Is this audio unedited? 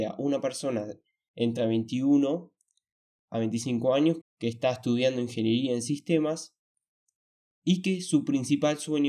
no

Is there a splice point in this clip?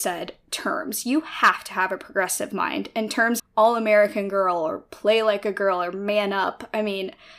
yes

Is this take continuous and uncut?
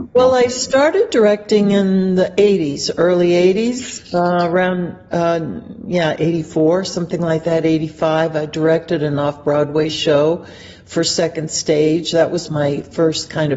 yes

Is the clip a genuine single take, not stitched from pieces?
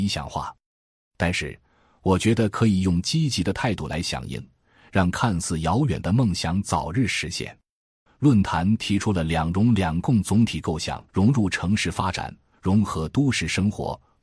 no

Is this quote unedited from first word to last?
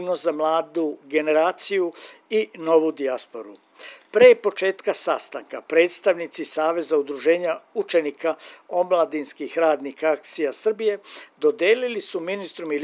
yes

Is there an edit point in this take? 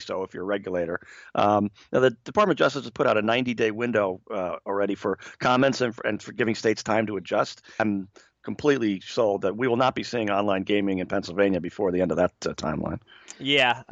yes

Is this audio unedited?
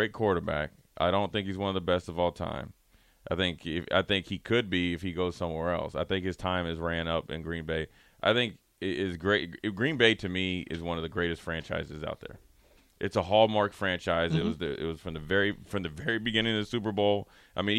yes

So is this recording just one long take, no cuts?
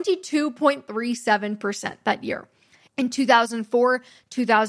no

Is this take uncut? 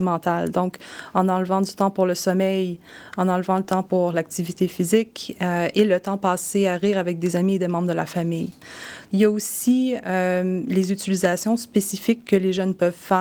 no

